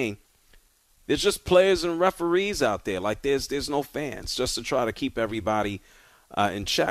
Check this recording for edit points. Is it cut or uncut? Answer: uncut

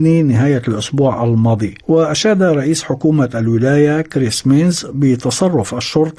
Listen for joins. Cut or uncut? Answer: cut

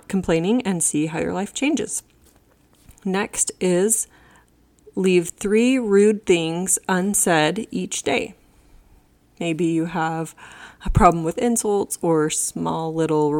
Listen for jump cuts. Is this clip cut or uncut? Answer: uncut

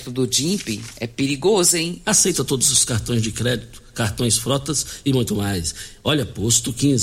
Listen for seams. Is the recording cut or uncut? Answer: cut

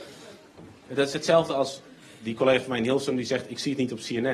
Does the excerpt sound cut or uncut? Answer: uncut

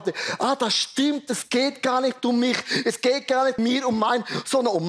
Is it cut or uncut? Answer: cut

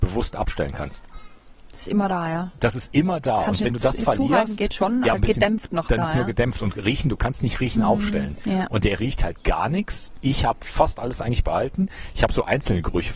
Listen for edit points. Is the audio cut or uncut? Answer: cut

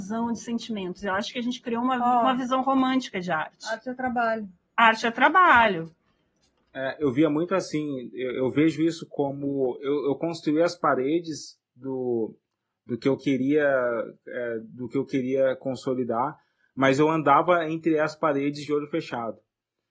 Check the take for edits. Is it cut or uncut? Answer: uncut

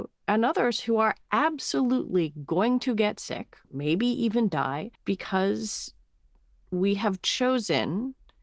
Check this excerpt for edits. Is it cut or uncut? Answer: cut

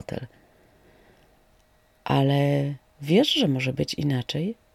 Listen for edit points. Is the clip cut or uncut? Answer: uncut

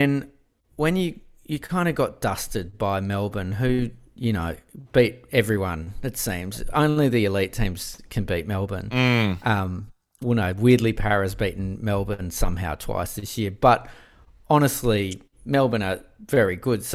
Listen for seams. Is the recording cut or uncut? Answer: uncut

